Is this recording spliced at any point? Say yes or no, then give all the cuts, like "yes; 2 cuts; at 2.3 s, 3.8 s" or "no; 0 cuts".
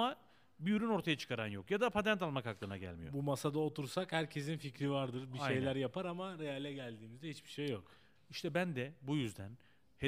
no; 0 cuts